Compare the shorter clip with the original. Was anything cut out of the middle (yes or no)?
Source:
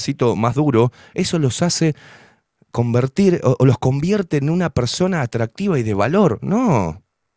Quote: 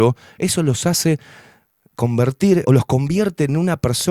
yes